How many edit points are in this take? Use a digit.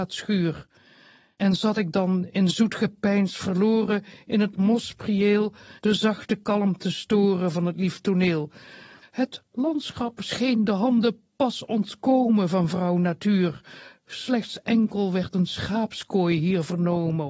2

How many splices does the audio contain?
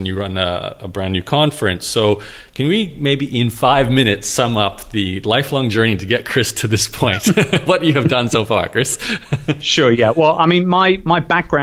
0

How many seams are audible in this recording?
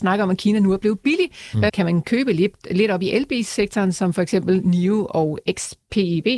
1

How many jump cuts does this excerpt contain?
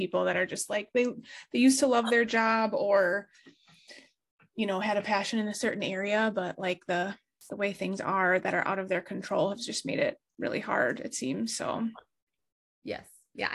0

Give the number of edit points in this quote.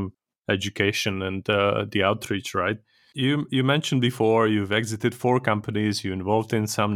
0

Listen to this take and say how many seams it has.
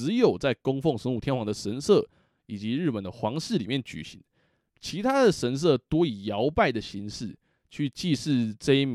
0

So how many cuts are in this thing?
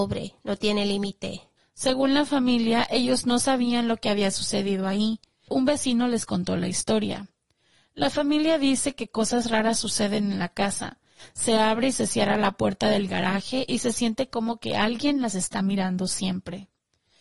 2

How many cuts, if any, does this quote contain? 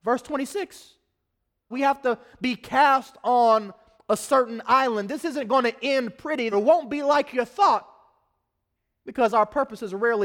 2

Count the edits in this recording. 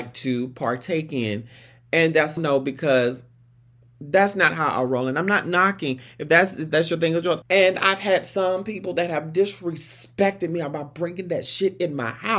2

